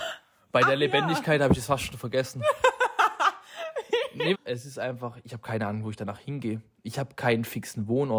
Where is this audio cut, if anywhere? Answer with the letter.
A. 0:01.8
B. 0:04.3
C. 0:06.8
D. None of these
B